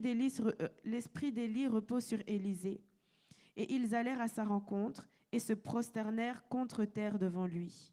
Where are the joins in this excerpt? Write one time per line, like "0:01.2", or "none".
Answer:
none